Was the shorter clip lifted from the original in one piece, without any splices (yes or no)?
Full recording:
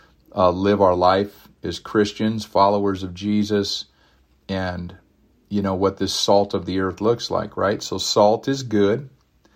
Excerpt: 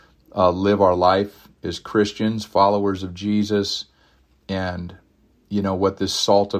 yes